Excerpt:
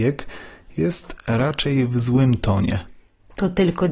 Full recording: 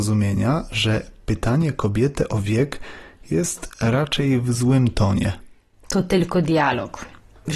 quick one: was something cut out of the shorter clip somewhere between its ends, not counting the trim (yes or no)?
no